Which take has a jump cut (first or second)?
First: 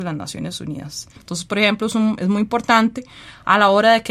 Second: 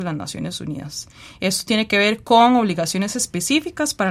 first